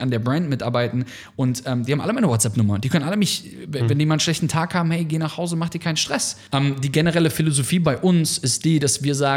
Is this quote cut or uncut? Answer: cut